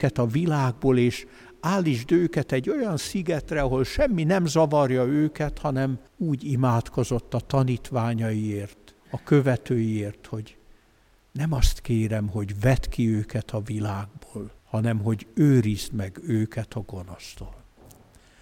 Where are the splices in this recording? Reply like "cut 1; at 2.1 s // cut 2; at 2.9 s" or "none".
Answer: cut 1; at 6.1 s // cut 2; at 9.0 s // cut 3; at 14.6 s